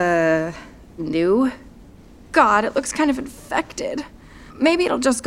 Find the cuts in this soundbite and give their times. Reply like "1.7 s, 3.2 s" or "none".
none